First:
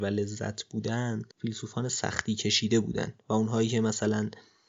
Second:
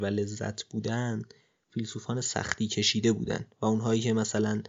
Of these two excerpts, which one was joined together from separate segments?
first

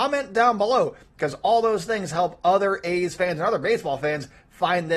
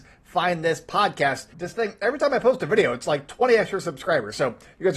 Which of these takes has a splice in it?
second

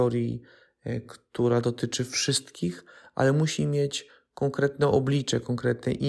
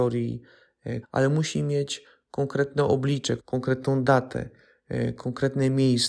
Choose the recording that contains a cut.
second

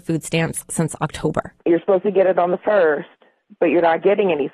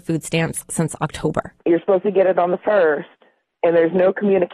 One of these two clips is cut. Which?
second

